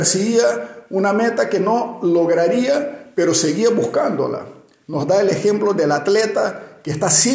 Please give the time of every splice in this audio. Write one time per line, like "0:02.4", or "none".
none